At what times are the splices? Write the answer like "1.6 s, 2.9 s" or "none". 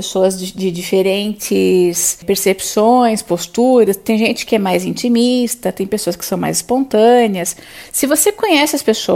none